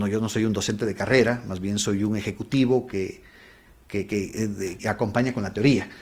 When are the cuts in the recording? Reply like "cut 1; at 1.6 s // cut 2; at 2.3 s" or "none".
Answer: cut 1; at 4.8 s